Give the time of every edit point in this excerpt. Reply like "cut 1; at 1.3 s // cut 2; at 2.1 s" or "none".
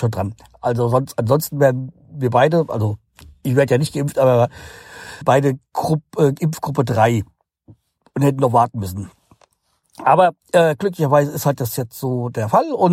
cut 1; at 5.2 s

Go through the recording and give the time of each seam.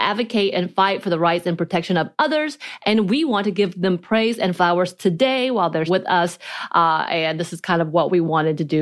cut 1; at 5.9 s

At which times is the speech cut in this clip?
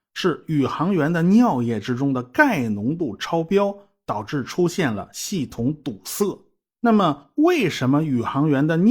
none

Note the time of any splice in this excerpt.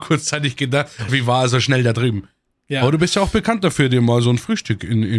cut 1; at 1.1 s

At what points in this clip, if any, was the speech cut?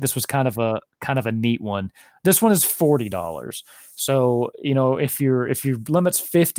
none

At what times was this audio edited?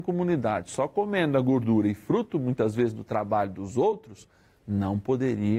none

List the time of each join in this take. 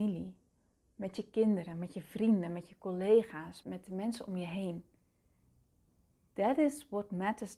cut 1; at 3.6 s

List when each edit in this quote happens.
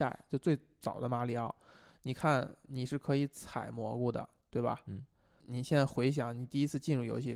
none

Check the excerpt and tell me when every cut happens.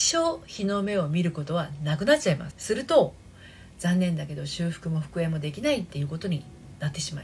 cut 1; at 2.5 s

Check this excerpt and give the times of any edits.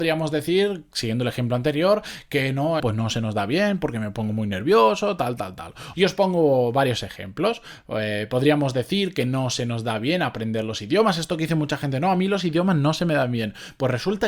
cut 1; at 2.8 s // cut 2; at 5.9 s

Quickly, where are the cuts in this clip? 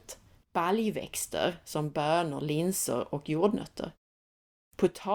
none

